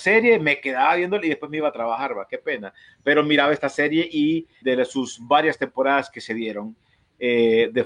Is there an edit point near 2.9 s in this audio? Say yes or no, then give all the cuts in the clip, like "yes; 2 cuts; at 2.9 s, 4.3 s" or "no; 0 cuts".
no; 1 cut; at 4.6 s